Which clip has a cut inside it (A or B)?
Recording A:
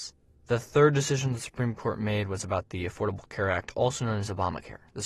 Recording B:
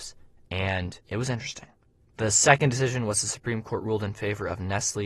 B